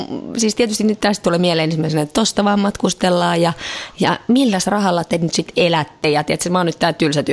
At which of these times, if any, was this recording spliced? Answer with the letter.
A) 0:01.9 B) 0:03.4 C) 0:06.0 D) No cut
D